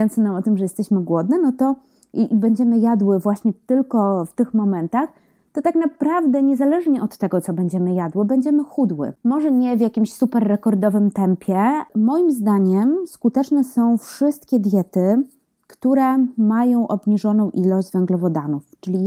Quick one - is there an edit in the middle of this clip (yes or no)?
no